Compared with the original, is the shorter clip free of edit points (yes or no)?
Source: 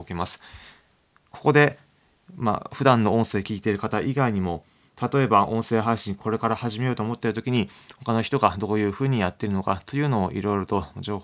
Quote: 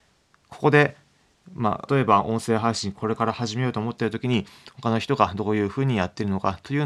no